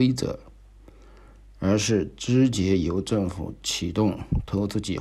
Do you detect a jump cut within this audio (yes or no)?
no